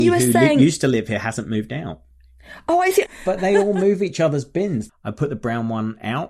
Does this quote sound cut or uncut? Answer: cut